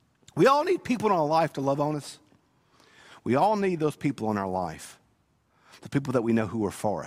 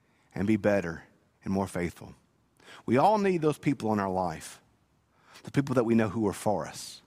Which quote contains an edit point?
first; 1 cut; at 3.1 s

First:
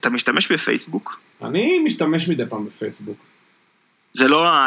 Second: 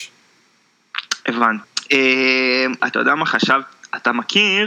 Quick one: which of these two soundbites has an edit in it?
second; 2 cuts; at 1.6 s, 2.8 s

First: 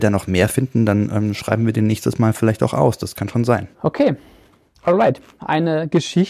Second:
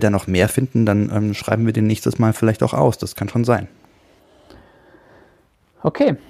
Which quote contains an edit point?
first; 2 cuts; at 3.7 s, 5.4 s

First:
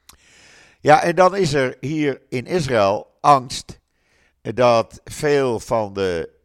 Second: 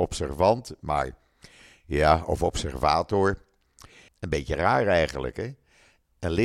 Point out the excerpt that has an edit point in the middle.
second; 1 cut; at 4.1 s

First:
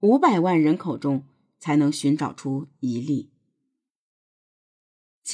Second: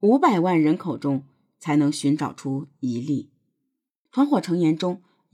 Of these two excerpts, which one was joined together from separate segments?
second; 1 cut; at 4.1 s

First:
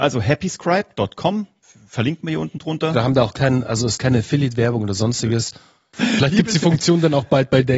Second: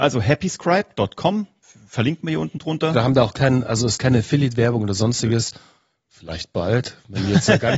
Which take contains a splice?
first; 1 cut; at 5.9 s

